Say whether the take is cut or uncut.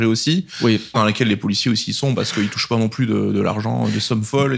cut